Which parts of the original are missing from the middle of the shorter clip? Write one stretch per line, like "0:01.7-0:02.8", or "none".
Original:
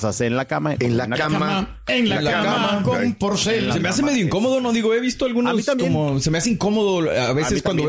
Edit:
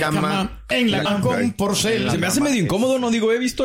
0:02.2-0:02.7